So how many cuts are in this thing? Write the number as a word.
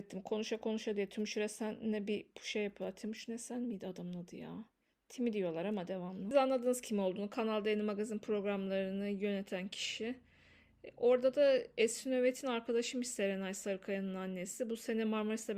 zero